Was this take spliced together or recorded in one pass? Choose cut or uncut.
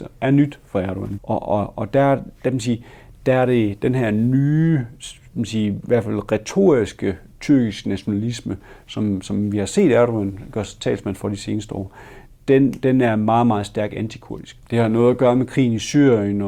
cut